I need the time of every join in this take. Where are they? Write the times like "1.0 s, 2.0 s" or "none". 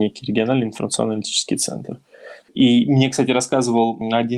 2.4 s